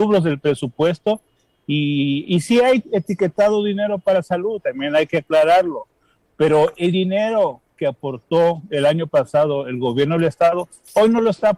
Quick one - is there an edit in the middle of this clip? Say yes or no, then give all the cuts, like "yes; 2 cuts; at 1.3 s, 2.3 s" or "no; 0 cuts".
no; 0 cuts